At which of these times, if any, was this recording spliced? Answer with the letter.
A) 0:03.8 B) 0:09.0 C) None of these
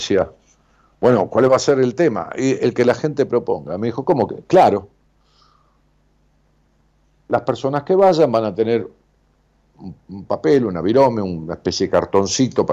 C